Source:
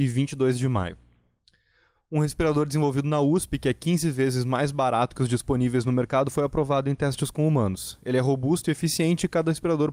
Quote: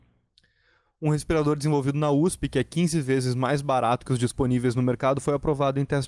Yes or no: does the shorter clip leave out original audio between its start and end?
no